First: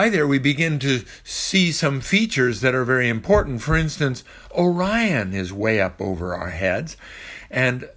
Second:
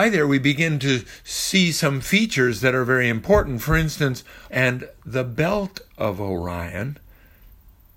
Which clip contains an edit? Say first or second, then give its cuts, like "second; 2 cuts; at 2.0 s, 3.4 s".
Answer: second; 1 cut; at 4.5 s